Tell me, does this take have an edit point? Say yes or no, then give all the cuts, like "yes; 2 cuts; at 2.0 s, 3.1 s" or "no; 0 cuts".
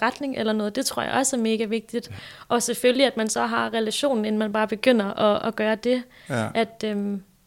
no; 0 cuts